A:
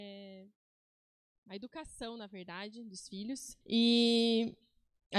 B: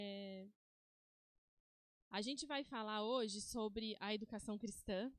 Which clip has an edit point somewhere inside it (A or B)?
A